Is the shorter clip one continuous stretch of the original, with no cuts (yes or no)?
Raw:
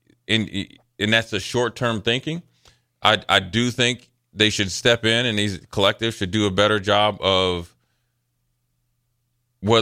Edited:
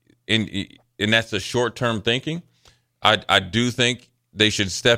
yes